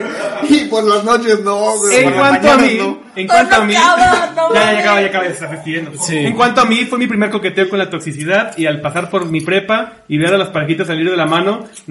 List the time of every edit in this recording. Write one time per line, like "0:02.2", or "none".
none